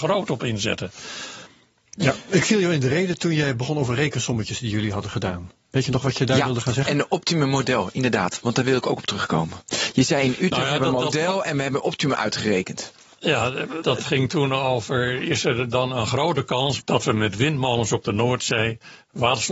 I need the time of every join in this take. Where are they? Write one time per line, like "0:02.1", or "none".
0:13.8
0:16.8